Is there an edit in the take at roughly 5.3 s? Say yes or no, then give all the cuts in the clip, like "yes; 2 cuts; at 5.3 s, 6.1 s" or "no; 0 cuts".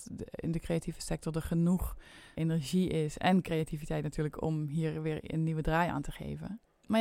no; 1 cut; at 2.3 s